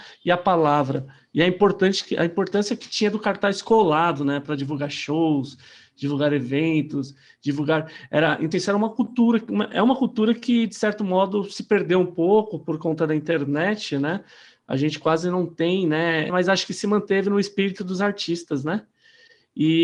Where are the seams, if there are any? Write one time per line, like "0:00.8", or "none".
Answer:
0:08.5
0:16.3